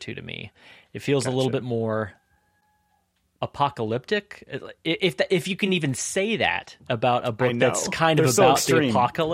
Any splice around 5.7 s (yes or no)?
no